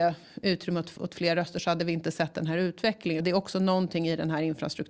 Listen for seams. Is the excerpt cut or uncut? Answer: cut